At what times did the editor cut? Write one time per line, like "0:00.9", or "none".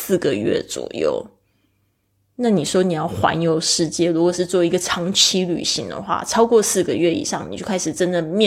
none